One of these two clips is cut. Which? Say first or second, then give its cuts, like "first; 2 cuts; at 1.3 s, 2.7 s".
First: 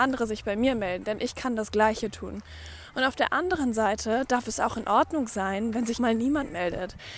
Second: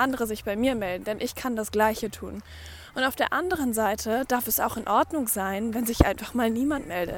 first; 1 cut; at 6.0 s